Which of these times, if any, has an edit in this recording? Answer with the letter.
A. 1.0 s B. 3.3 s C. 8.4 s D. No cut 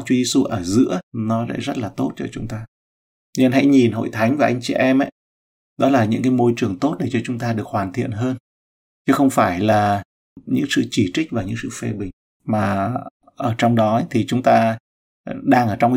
A